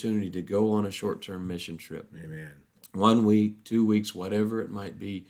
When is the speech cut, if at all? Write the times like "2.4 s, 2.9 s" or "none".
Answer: none